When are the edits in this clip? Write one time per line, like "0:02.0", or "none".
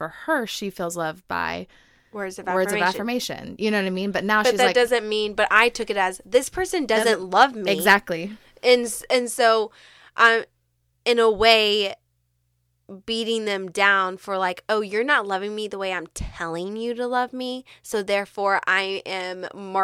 0:10.9